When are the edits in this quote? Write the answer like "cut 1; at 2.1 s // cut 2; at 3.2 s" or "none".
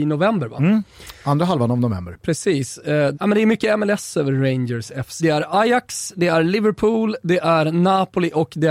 cut 1; at 3.1 s // cut 2; at 5.2 s